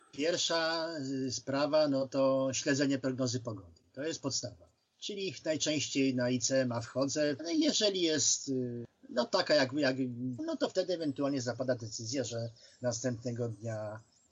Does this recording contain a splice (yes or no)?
yes